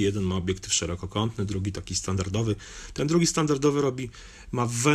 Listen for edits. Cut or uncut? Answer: uncut